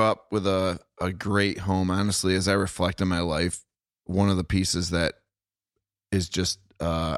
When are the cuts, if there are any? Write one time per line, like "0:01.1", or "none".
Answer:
none